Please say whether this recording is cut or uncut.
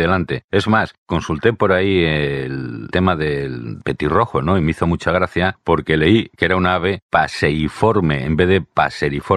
uncut